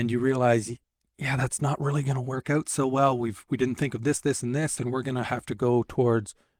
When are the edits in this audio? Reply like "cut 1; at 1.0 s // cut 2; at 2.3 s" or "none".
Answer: cut 1; at 4.8 s

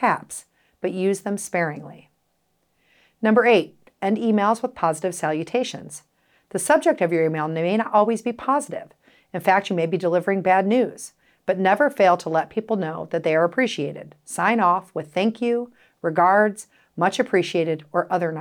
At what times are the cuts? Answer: none

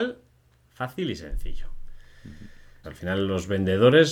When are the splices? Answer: cut 1; at 2.8 s

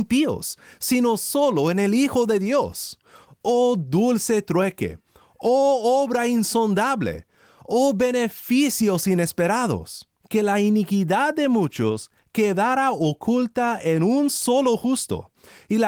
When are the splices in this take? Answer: none

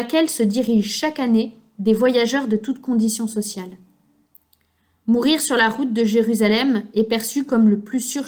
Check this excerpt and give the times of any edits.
none

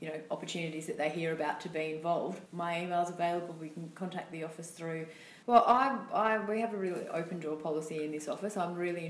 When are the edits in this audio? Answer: cut 1; at 2.5 s // cut 2; at 5.4 s

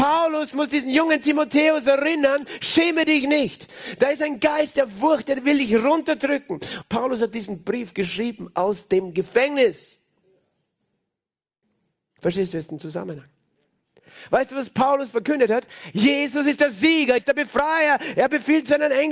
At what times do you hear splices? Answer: cut 1; at 6.8 s // cut 2; at 17.2 s

